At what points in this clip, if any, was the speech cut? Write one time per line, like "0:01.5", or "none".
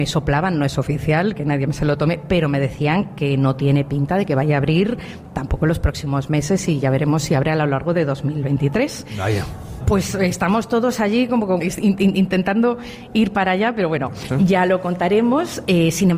0:09.8
0:11.6
0:14.3